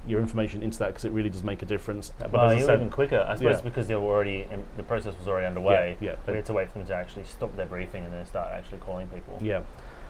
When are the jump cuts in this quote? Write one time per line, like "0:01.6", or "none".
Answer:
0:02.2